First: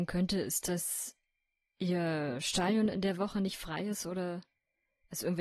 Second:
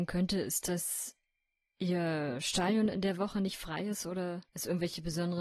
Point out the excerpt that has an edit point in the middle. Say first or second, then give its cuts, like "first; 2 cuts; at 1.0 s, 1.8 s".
second; 1 cut; at 4.5 s